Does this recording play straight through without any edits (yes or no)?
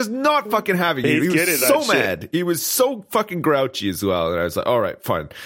yes